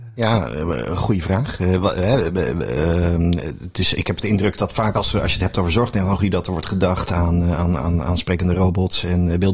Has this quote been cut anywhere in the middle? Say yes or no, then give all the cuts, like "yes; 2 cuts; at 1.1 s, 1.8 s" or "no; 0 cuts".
no; 0 cuts